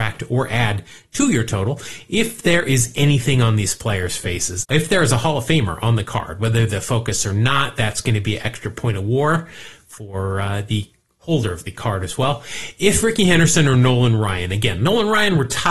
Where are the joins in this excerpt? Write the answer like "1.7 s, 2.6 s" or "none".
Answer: 4.6 s